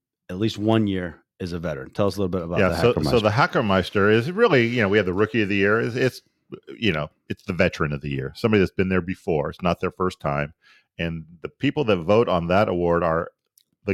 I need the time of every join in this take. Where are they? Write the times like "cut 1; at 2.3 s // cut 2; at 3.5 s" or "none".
none

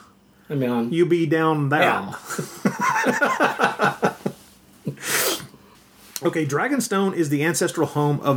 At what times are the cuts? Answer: none

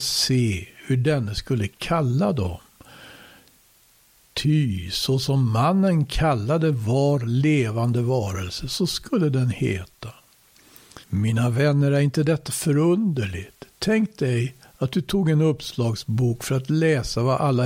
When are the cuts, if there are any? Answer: cut 1; at 11.0 s

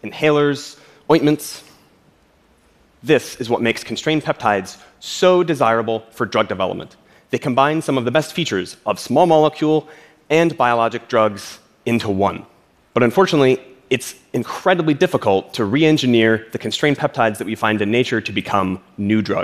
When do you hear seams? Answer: none

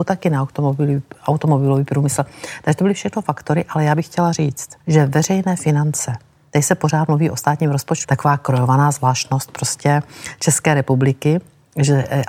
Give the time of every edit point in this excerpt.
cut 1; at 4.8 s // cut 2; at 8.0 s

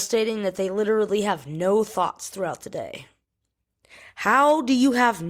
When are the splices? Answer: none

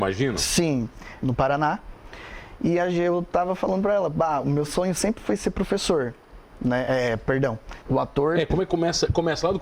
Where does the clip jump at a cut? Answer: cut 1; at 1.2 s // cut 2; at 7.8 s

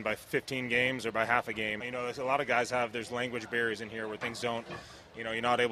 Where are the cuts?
cut 1; at 1.8 s

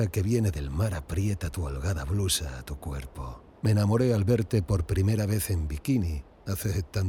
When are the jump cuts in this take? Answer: cut 1; at 3.5 s

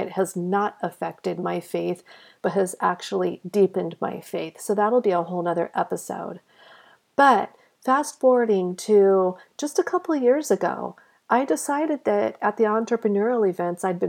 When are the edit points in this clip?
none

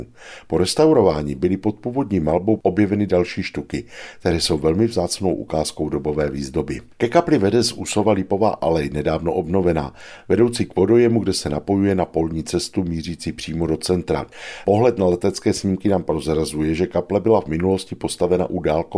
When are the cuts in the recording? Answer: none

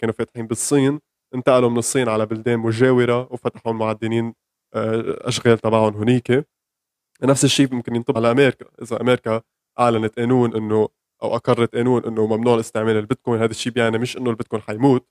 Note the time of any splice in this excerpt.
cut 1; at 8.1 s

